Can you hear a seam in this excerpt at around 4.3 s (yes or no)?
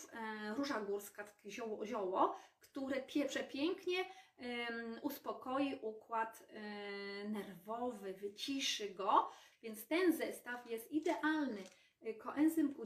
no